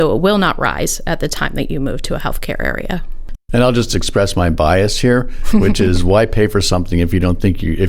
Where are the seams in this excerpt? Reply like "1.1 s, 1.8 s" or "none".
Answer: 3.3 s